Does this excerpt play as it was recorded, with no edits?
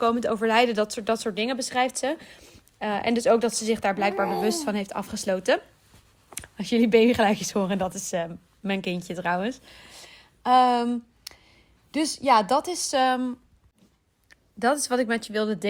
yes; 0 cuts

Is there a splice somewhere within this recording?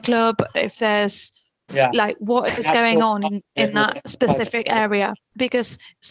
yes; 1 cut; at 1.7 s

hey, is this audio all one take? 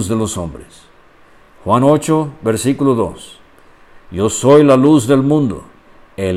yes; 0 cuts

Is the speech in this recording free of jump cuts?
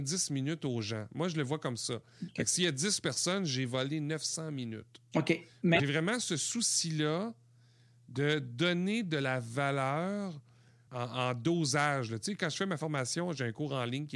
no; 2 cuts; at 5.8 s, 10.9 s

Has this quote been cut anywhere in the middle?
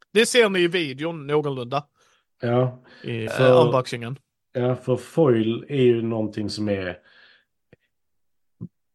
yes; 1 cut; at 3.3 s

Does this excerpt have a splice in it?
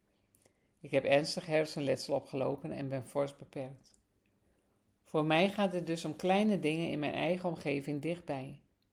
no; 0 cuts

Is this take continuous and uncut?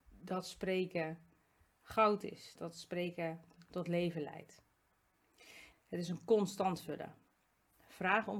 no; 2 cuts; at 2.5 s, 5.7 s

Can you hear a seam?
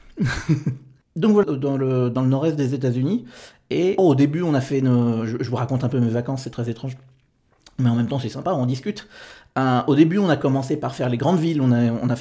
yes; 2 cuts; at 1.4 s, 4.0 s

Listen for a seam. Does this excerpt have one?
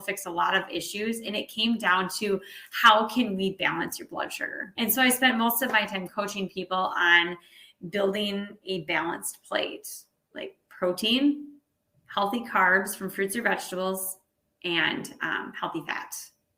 yes; 1 cut; at 4.7 s

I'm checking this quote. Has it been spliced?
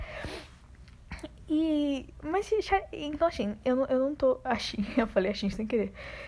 no; 0 cuts

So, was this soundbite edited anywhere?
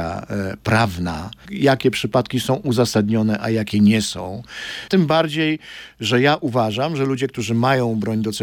yes; 2 cuts; at 1.5 s, 4.9 s

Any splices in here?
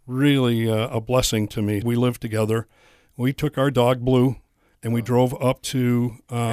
yes; 1 cut; at 1.8 s

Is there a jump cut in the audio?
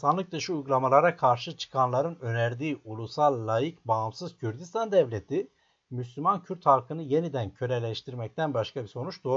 no; 0 cuts

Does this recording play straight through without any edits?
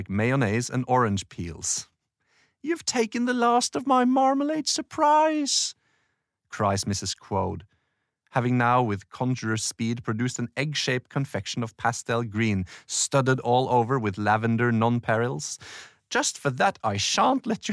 yes; 0 cuts

